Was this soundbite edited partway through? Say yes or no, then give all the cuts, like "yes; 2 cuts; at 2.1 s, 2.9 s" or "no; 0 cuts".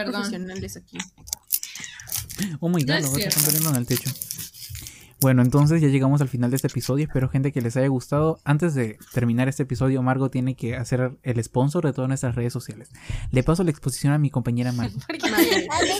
no; 0 cuts